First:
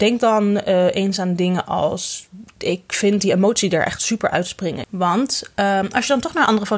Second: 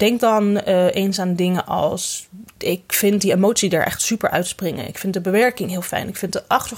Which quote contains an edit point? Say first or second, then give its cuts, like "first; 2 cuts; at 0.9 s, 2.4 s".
first; 1 cut; at 4.8 s